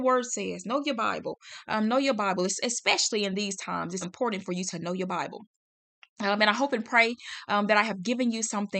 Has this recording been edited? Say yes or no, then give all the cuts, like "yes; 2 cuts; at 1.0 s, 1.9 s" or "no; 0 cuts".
yes; 1 cut; at 4.0 s